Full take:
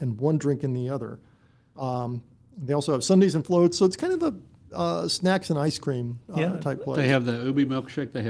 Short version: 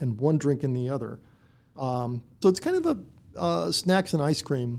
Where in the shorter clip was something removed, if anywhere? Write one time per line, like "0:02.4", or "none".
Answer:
0:02.4